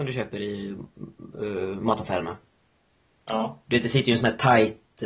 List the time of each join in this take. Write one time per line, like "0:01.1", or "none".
none

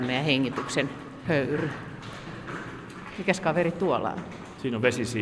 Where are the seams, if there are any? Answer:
0:03.1

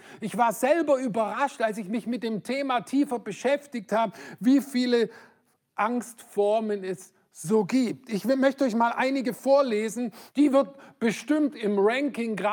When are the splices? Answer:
0:10.3

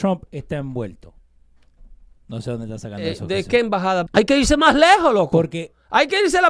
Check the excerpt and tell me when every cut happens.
0:04.1

